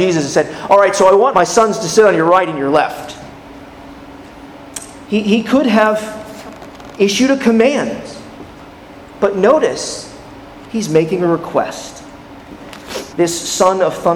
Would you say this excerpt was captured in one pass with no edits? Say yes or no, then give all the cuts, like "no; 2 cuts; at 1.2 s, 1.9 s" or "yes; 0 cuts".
no; 3 cuts; at 1.3 s, 5.1 s, 13.1 s